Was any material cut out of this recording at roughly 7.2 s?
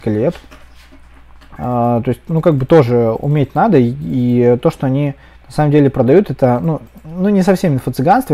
no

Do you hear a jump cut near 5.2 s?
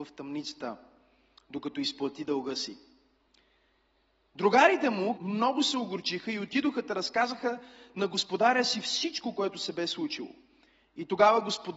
yes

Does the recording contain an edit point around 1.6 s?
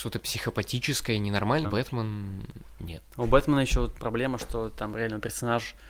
yes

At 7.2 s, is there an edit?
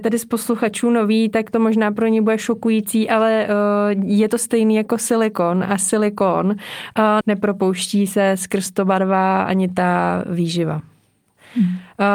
yes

